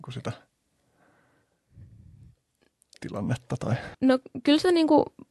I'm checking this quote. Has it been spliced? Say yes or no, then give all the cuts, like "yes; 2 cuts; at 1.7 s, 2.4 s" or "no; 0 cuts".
yes; 1 cut; at 3.9 s